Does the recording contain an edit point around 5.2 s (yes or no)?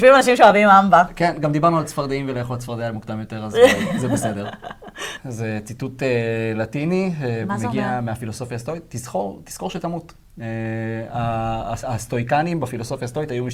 yes